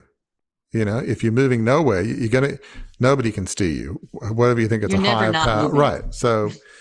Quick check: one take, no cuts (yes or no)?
yes